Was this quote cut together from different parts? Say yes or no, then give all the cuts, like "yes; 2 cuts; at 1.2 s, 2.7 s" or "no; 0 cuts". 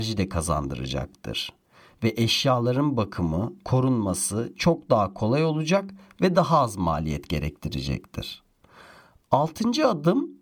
no; 0 cuts